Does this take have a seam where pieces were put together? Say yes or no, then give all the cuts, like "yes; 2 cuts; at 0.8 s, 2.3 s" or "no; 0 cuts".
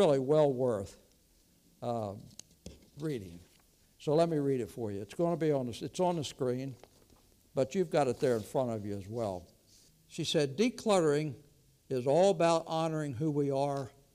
yes; 1 cut; at 9.9 s